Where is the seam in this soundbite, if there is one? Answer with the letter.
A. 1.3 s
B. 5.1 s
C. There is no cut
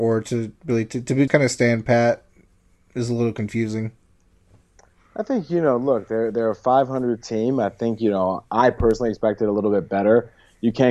A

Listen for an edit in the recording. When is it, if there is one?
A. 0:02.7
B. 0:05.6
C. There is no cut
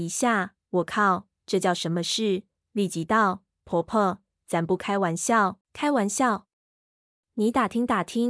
B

